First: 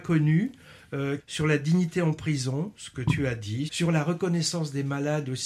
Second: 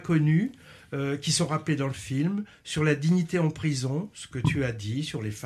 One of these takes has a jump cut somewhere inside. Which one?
first; 2 cuts; at 1.2 s, 3.7 s

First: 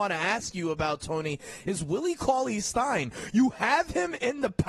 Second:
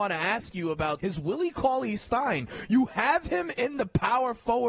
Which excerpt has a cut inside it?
second; 1 cut; at 1.0 s

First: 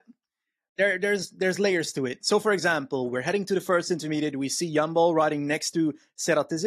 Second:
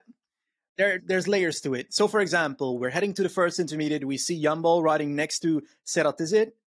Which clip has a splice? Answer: second; 1 cut; at 1.0 s

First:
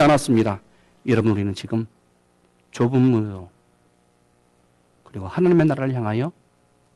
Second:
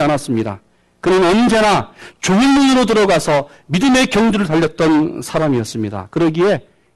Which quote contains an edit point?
first; 1 cut; at 0.9 s

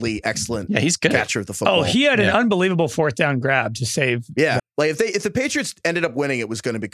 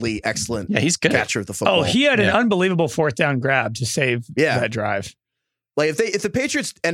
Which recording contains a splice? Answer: first; 1 cut; at 4.6 s

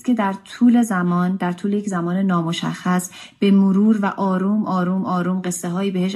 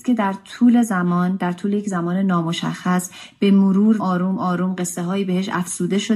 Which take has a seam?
second; 1 cut; at 4.0 s

